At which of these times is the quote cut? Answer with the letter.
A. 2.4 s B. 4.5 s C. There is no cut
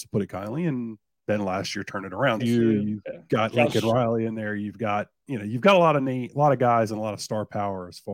A